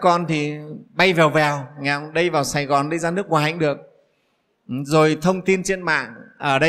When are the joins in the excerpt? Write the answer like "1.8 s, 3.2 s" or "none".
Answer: none